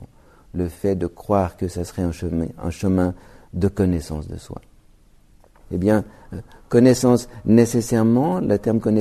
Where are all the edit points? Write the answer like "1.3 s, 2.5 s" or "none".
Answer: 5.6 s